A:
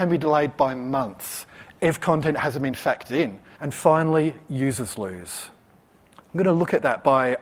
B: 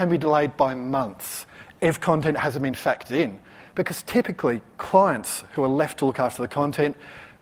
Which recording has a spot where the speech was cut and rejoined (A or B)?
A